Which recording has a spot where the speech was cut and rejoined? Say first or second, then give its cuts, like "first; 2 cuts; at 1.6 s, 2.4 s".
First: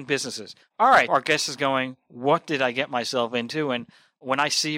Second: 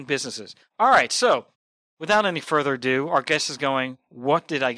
first; 1 cut; at 1.1 s